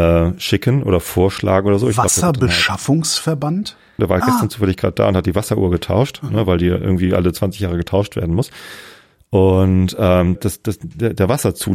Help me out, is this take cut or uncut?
cut